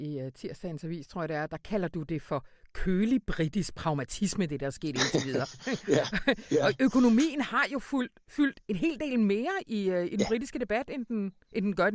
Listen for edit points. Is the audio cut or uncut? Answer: uncut